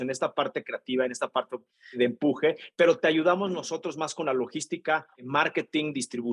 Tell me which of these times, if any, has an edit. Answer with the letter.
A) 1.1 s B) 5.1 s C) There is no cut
B